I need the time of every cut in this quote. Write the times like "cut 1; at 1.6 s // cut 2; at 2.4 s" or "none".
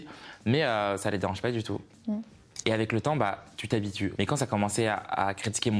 cut 1; at 2.6 s // cut 2; at 4.1 s